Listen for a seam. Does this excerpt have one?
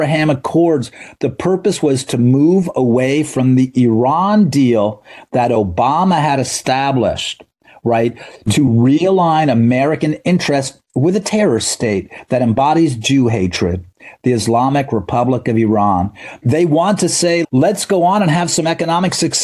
yes; 2 cuts; at 16.4 s, 17.4 s

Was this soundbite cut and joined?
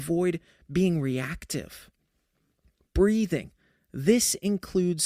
no; 0 cuts

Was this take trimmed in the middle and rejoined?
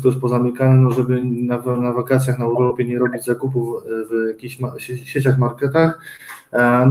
no; 0 cuts

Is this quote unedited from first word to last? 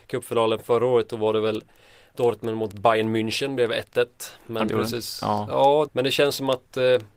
no; 2 cuts; at 4.7 s, 5.9 s

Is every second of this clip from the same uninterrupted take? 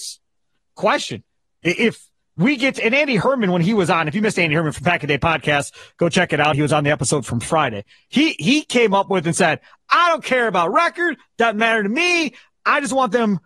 yes; 0 cuts

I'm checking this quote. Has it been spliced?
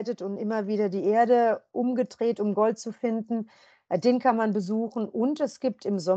no; 0 cuts

